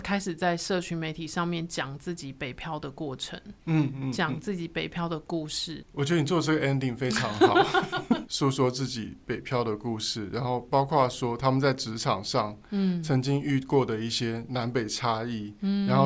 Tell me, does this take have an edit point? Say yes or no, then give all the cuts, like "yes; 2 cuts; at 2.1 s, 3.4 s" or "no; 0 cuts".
yes; 2 cuts; at 5.8 s, 8.2 s